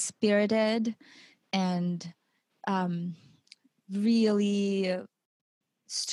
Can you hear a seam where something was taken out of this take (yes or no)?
no